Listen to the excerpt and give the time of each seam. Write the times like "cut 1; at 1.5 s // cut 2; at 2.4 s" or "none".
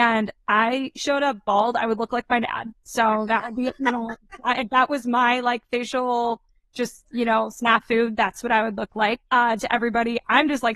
cut 1; at 9.3 s